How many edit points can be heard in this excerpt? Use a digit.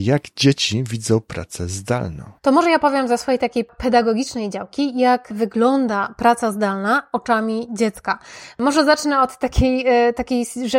1